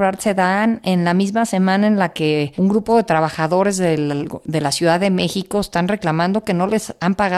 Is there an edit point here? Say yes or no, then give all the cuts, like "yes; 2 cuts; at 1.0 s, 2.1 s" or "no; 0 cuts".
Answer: no; 0 cuts